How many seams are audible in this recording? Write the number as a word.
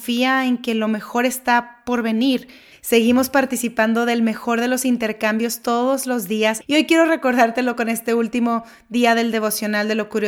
two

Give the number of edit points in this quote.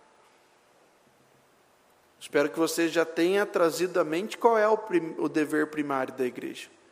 zero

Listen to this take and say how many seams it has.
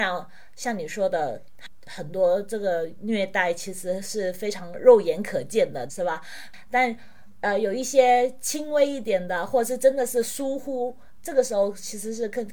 one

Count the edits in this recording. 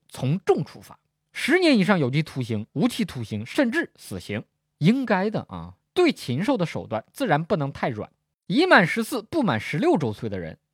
one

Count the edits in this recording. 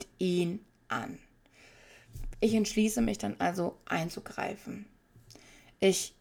one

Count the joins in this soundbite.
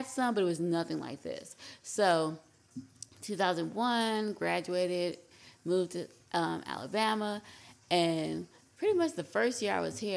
zero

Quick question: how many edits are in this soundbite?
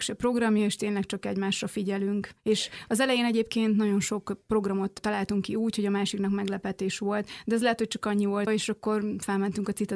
one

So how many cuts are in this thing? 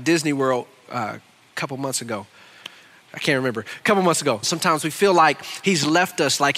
two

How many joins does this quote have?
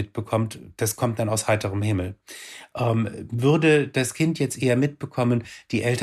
zero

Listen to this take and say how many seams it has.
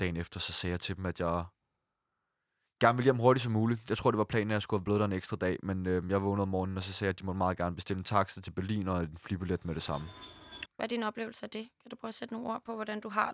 one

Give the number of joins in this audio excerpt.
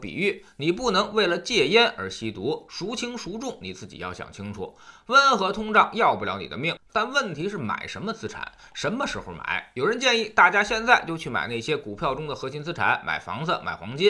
one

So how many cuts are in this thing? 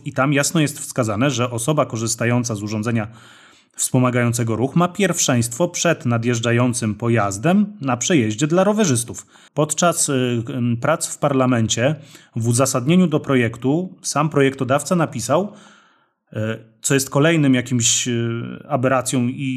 one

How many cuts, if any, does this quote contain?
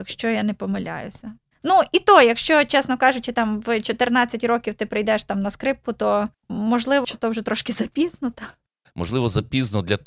one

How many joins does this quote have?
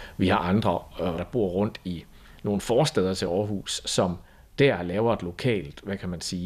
one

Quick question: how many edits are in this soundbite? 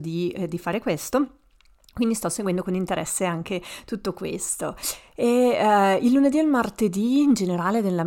zero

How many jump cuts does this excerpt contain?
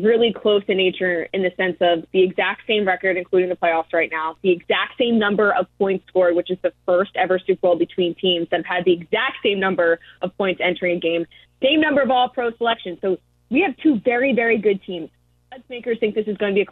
zero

